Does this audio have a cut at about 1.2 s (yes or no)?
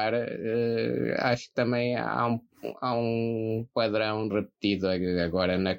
no